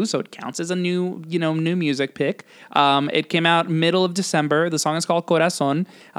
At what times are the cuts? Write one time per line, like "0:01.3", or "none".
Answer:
none